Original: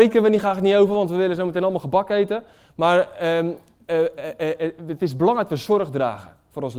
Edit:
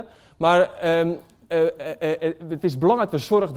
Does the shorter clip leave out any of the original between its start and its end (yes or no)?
no